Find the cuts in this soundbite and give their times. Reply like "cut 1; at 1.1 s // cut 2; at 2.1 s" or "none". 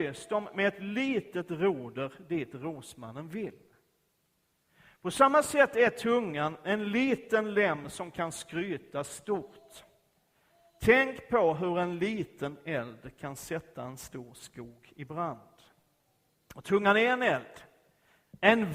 none